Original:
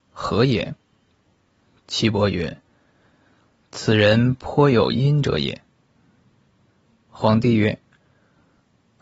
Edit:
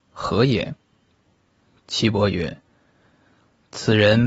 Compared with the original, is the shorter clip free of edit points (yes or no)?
yes